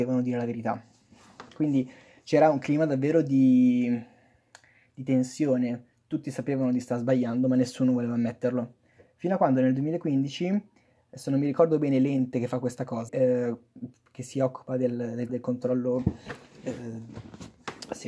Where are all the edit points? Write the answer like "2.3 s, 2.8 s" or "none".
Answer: 13.1 s, 15.3 s